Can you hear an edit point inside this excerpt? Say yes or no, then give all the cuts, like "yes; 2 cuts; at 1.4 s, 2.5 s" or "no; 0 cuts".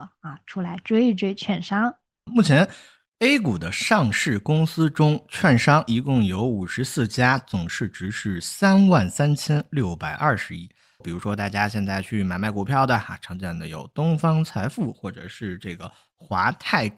yes; 2 cuts; at 2.3 s, 11.0 s